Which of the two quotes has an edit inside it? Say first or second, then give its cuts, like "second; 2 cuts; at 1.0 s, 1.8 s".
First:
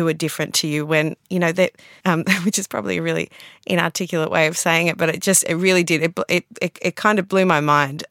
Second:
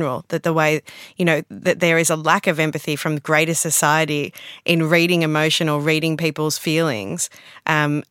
first; 1 cut; at 2.0 s